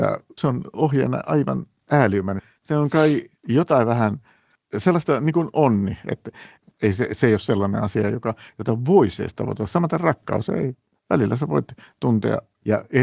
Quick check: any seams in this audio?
no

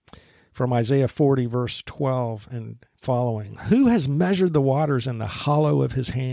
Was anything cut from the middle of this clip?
no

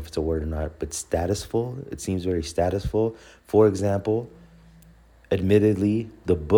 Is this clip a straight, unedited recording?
yes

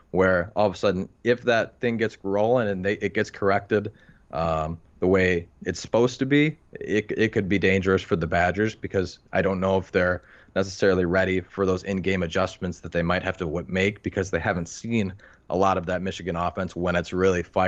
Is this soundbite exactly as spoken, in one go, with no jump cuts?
yes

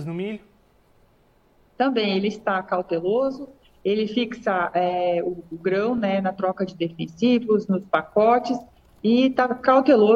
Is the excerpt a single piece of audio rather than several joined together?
yes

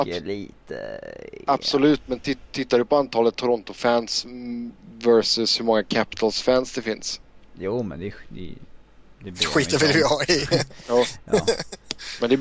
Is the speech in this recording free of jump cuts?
yes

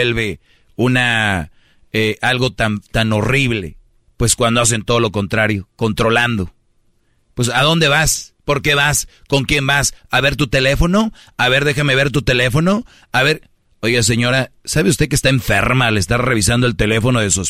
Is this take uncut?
yes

